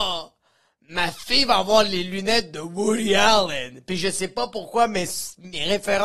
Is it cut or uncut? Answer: uncut